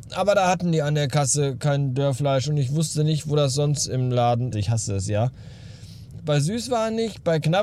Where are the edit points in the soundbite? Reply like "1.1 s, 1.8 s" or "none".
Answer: 4.5 s, 6.2 s

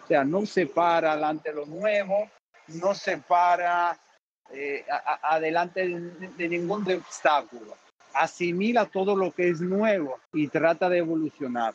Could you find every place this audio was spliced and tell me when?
6.9 s, 10.3 s

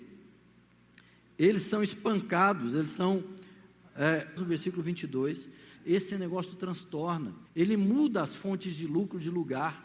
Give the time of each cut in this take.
4.4 s, 5.8 s, 7.5 s

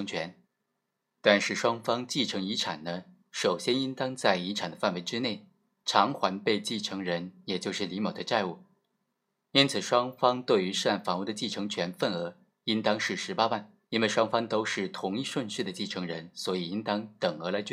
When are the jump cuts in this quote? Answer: 13.8 s

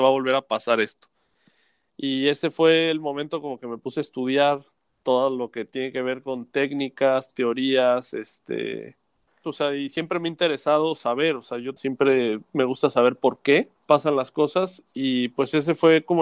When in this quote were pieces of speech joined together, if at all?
9.4 s, 11.8 s, 13.8 s

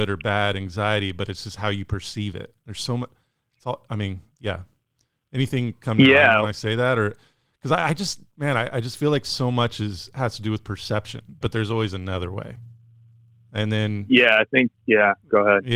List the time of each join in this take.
11.4 s

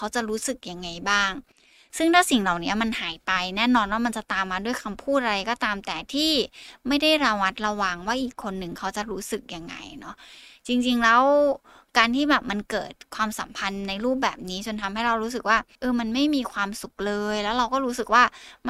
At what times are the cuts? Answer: none

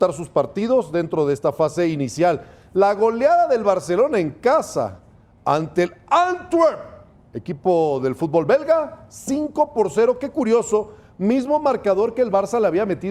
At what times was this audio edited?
none

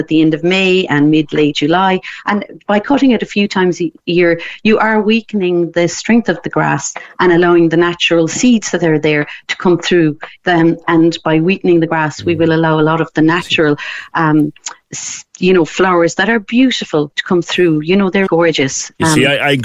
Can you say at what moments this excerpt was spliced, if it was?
10.4 s, 18.3 s

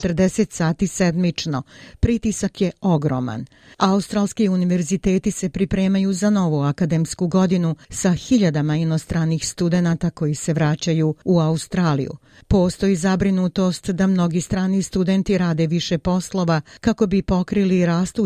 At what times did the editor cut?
3.7 s

